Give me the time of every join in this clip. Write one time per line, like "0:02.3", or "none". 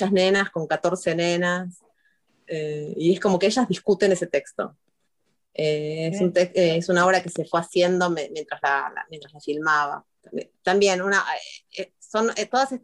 none